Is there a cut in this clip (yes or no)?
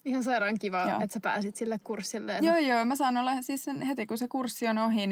yes